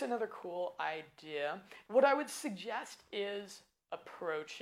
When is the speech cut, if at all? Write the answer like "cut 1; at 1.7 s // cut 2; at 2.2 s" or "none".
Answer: cut 1; at 1.9 s